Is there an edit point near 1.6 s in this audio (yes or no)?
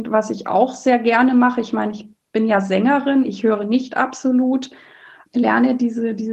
no